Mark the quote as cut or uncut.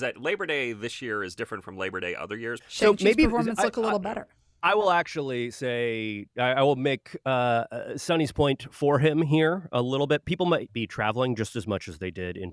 cut